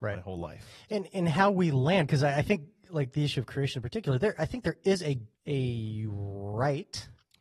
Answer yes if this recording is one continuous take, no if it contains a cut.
no